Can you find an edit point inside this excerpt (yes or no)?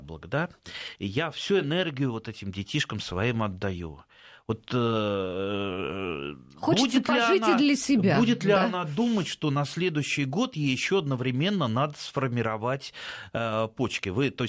no